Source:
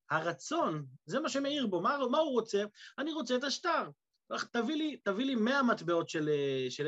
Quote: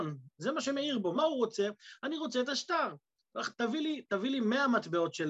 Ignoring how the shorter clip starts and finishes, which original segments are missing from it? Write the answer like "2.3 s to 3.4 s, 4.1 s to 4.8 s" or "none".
1.8 s to 2.1 s

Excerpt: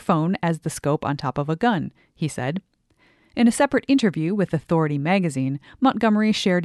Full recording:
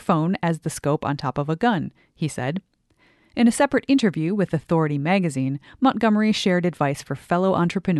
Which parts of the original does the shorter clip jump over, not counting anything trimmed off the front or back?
none

